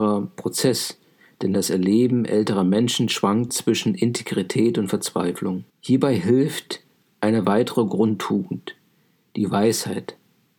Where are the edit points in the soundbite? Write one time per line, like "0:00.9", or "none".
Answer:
0:03.5
0:05.7